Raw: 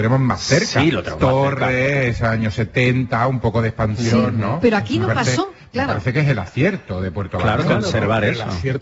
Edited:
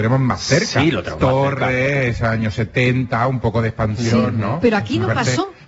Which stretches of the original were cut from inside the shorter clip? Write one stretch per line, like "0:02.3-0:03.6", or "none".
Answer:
none